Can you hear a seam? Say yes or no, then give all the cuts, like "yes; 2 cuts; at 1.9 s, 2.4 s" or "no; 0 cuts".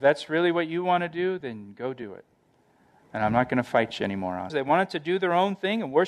yes; 1 cut; at 4.5 s